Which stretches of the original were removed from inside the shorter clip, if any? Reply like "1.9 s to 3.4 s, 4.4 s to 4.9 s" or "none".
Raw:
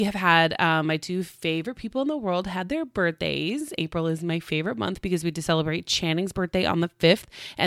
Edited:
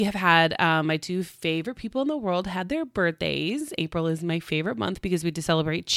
none